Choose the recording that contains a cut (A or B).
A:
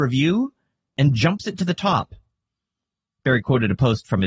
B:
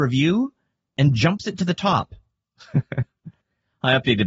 B